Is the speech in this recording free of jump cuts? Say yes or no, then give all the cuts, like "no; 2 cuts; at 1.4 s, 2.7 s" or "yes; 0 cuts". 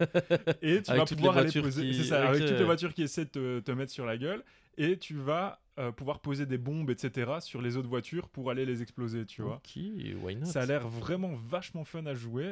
yes; 0 cuts